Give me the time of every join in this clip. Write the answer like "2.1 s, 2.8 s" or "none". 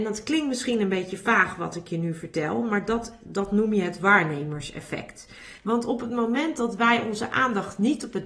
5.6 s